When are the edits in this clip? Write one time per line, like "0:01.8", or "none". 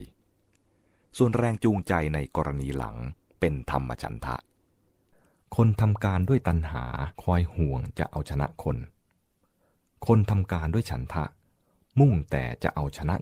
0:07.1